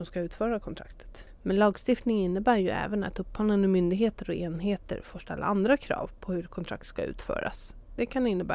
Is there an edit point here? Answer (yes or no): yes